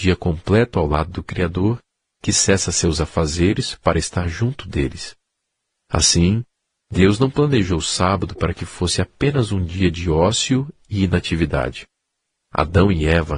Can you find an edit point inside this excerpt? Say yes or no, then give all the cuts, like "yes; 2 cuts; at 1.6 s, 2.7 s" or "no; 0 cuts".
yes; 1 cut; at 12.4 s